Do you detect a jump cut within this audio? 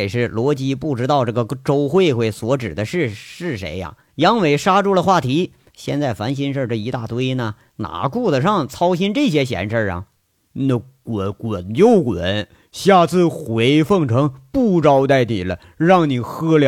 yes; 1 cut; at 4.1 s

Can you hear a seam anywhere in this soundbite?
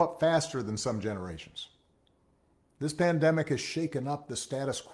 no; 0 cuts

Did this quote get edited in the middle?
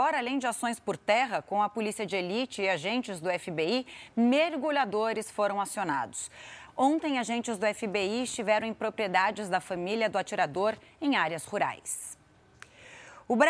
yes; 1 cut; at 6.7 s

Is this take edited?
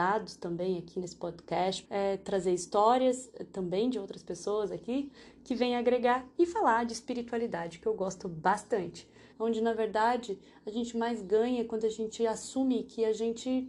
yes; 2 cuts; at 1.8 s, 9.3 s

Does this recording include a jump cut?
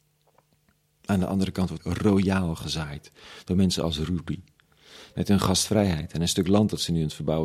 yes; 2 cuts; at 1.8 s, 5.1 s

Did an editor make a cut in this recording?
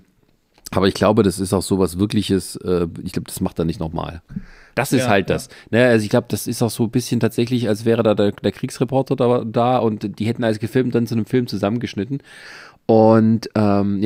yes; 1 cut; at 4.7 s

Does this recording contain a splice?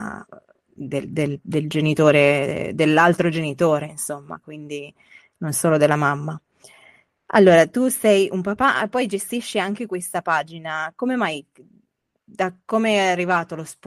no; 0 cuts

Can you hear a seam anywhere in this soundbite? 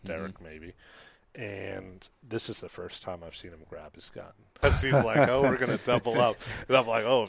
yes; 2 cuts; at 2.2 s, 4.6 s

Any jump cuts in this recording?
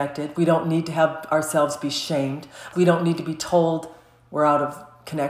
yes; 1 cut; at 2.7 s

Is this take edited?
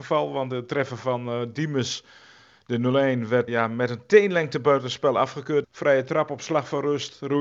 yes; 2 cuts; at 3.5 s, 5.6 s

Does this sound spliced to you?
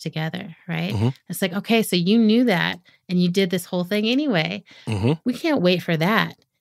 no; 0 cuts

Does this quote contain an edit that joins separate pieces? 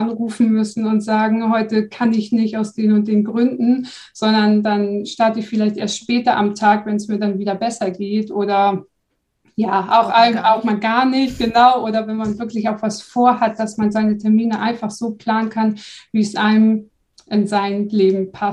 no; 0 cuts

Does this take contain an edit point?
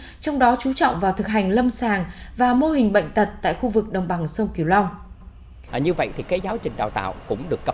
yes; 1 cut; at 5.7 s

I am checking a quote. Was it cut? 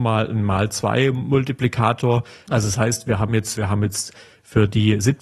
yes; 2 cuts; at 2.5 s, 3.6 s

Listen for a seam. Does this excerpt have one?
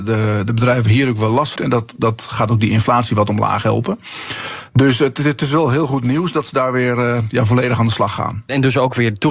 yes; 1 cut; at 1.6 s

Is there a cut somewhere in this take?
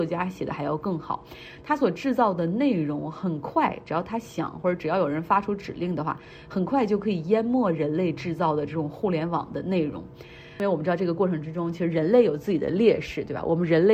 no; 0 cuts

